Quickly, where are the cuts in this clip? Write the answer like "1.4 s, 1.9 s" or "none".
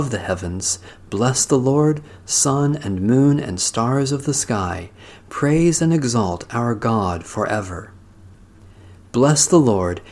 none